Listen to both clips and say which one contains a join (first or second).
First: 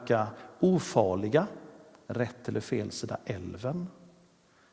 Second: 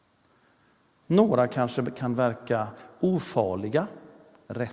second